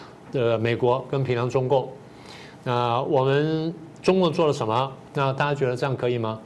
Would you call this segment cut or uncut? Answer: cut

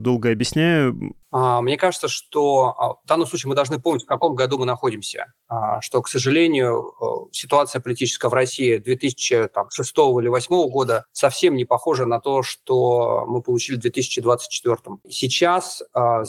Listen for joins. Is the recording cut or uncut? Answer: cut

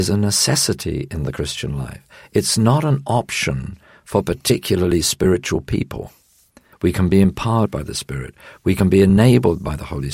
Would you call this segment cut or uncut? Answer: cut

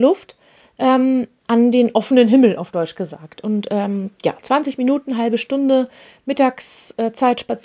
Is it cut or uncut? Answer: uncut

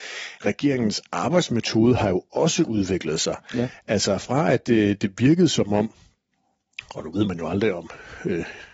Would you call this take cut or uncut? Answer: uncut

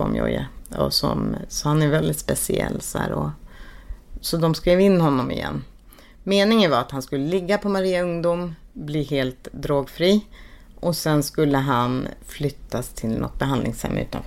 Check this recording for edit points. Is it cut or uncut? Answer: uncut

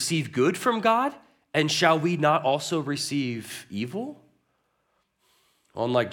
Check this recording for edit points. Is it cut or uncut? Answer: uncut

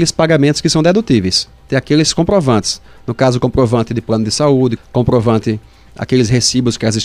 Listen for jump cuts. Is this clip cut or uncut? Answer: cut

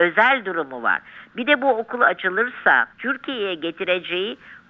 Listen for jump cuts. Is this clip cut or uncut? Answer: cut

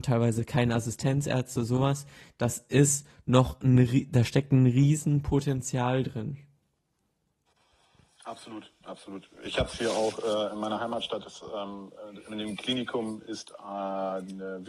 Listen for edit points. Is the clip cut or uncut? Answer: uncut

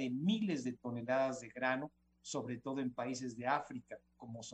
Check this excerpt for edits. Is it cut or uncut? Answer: uncut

